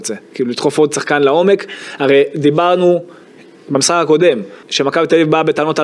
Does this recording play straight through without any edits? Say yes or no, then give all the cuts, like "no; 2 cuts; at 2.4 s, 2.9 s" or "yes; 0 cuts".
no; 1 cut; at 4.6 s